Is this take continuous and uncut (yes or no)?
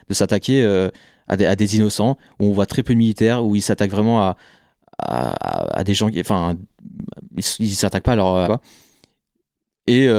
no